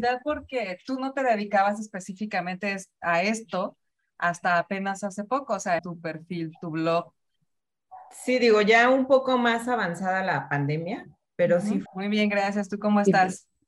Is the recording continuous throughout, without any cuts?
no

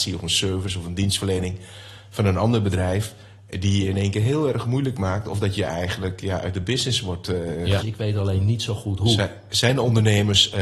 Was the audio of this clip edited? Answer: yes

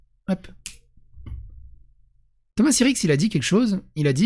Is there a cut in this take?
yes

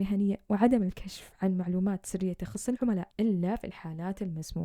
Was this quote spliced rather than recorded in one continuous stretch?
yes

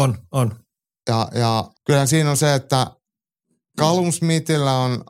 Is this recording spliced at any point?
yes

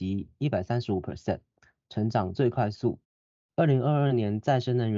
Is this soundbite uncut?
no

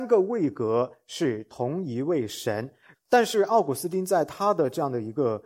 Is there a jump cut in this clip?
yes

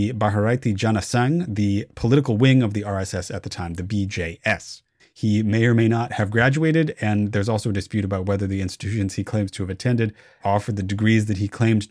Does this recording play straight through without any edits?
no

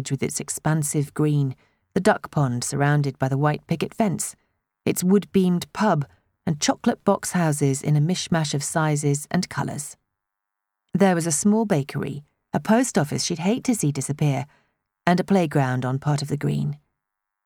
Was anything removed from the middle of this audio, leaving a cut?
no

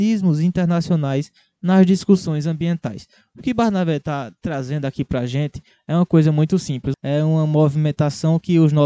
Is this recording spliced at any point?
yes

